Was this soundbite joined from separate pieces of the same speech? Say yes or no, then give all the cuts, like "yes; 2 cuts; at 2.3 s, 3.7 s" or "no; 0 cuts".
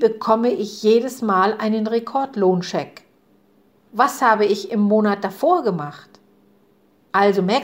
yes; 1 cut; at 3.8 s